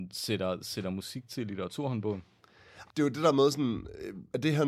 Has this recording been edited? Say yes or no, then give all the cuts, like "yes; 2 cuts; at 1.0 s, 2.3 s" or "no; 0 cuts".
yes; 1 cut; at 2.9 s